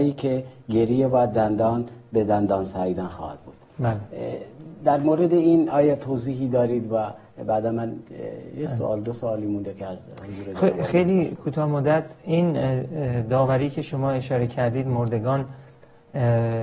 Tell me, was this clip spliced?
no; 0 cuts

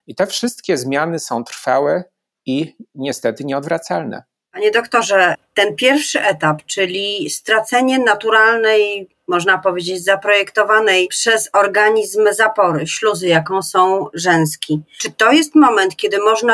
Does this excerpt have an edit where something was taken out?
no; 0 cuts

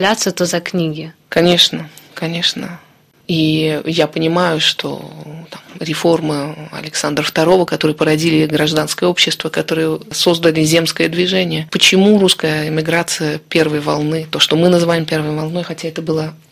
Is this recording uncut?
no; 1 cut; at 3.1 s

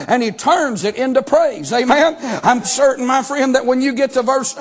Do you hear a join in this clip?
yes; 1 cut; at 2.6 s

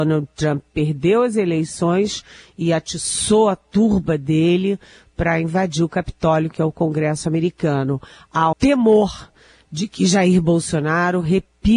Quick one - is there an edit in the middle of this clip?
yes; 1 cut; at 8.5 s

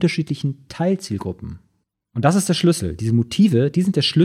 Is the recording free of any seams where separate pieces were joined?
yes; 0 cuts

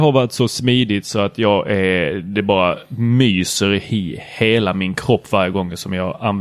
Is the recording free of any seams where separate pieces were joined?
yes; 0 cuts

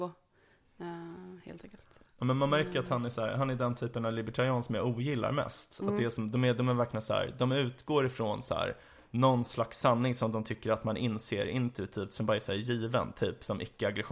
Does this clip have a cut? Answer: no; 0 cuts

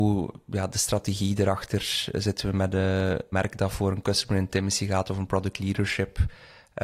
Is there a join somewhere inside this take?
yes; 1 cut; at 3.3 s

